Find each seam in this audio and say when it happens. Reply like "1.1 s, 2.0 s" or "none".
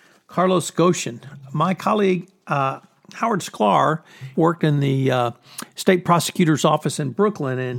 4.3 s